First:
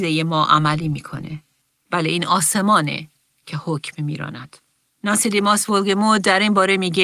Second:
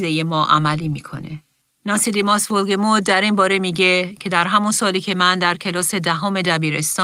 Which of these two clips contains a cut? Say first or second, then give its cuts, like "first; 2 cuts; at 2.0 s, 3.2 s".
second; 1 cut; at 1.7 s